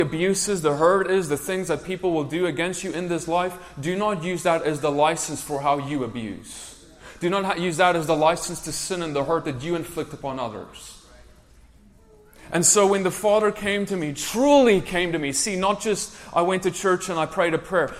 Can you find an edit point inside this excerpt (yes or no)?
no